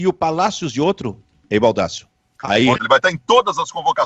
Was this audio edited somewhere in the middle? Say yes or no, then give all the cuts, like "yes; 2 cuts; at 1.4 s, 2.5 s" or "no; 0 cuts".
yes; 1 cut; at 2.8 s